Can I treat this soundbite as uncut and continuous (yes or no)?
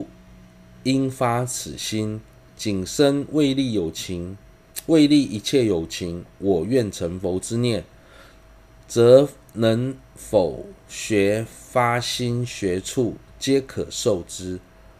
no